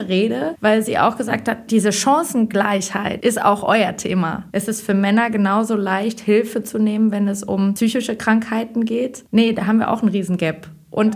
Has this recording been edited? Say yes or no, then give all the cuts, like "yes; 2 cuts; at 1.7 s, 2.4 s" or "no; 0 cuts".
yes; 2 cuts; at 1.7 s, 4.5 s